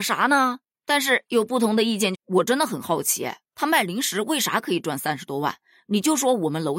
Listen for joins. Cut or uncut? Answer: cut